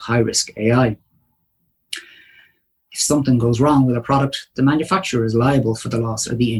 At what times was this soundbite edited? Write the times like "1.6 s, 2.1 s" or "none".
2.8 s